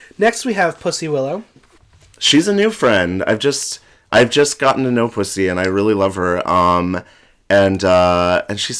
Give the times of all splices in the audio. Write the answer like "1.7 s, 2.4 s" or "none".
none